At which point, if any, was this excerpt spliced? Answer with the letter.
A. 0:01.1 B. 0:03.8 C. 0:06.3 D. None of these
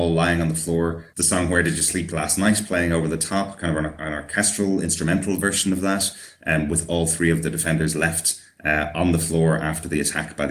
D